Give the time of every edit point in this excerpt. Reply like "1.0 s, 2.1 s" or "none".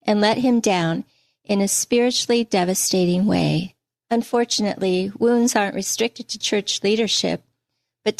4.0 s, 6.4 s